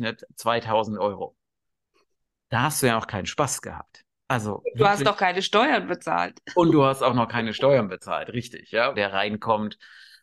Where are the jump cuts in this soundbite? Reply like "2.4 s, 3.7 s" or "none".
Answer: 8.9 s